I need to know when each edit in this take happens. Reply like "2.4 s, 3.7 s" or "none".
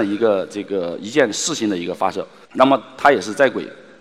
2.4 s